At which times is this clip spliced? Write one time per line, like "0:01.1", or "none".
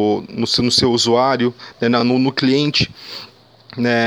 none